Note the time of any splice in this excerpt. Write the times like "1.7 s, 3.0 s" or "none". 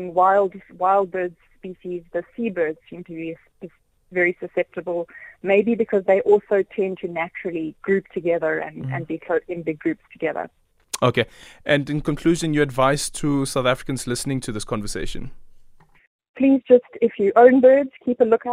none